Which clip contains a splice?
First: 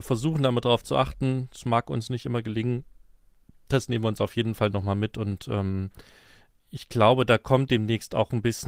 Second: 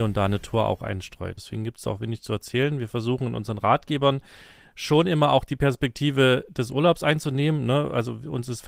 second; 1 cut; at 1.4 s

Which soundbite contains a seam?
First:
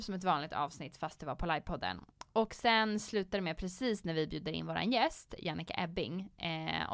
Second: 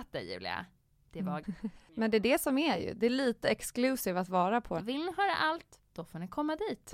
second; 2 cuts; at 1.4 s, 4.8 s

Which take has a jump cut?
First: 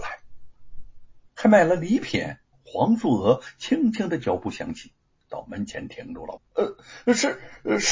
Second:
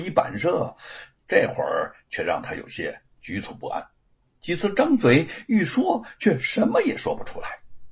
first; 3 cuts; at 1.3 s, 2.5 s, 6.4 s

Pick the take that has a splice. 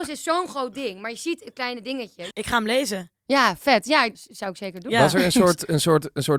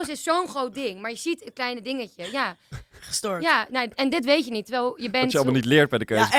first; 2 cuts; at 2.3 s, 4.1 s

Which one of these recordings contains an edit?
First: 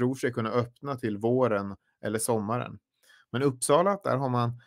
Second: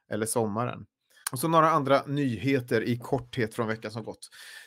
second; 1 cut; at 1.2 s

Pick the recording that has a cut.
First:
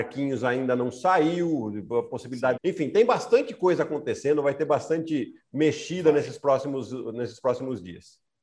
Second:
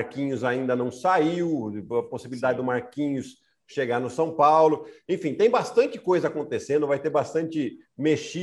first; 1 cut; at 2.6 s

